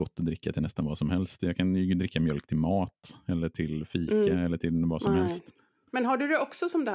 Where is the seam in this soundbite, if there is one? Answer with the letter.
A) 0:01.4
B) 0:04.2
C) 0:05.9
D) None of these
C